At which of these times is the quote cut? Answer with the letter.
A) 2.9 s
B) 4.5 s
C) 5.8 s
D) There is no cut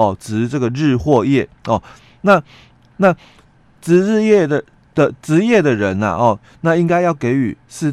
A